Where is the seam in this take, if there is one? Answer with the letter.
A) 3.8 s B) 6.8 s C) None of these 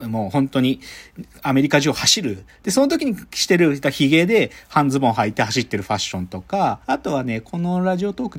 B